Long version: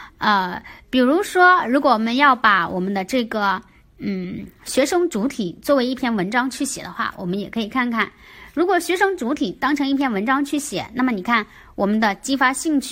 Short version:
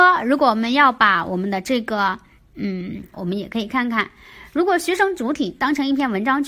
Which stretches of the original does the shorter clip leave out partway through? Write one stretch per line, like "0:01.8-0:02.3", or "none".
0:04.6-0:07.1

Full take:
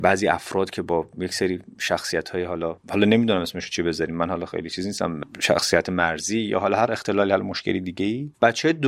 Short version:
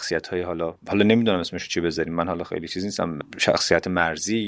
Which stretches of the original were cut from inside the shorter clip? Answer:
none

